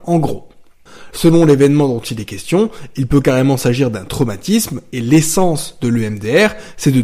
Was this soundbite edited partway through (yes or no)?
yes